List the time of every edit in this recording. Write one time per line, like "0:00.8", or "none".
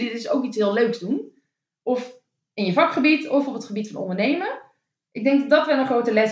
none